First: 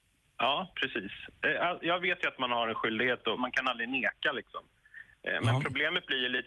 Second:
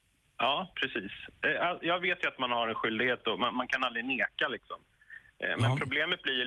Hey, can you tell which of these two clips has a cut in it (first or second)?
first